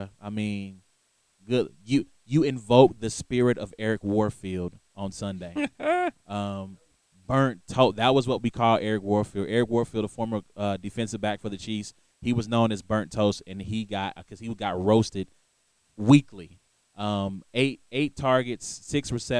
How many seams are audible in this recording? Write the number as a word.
zero